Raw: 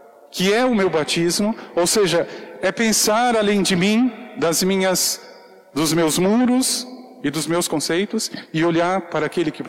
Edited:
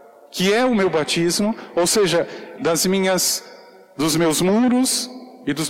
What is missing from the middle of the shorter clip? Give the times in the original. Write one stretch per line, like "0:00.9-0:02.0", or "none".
0:02.6-0:04.3